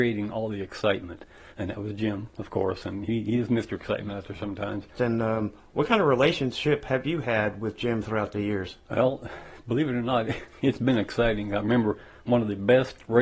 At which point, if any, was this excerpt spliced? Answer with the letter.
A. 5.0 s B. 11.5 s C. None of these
A